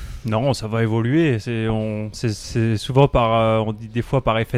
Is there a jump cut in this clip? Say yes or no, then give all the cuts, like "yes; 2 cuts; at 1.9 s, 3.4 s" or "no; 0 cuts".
no; 0 cuts